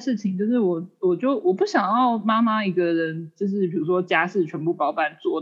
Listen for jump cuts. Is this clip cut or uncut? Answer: uncut